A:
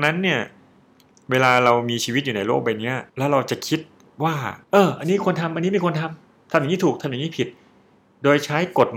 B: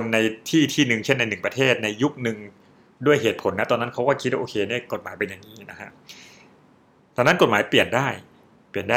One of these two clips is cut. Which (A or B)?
A